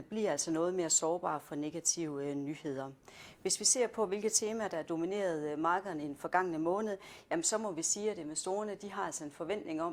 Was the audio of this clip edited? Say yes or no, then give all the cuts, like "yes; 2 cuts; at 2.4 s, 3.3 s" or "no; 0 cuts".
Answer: no; 0 cuts